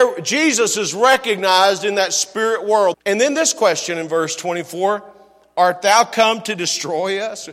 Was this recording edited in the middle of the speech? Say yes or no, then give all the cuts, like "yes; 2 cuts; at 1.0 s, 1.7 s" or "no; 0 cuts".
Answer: yes; 1 cut; at 2.9 s